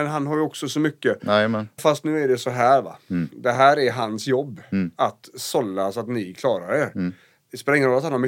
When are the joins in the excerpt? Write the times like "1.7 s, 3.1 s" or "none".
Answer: 1.8 s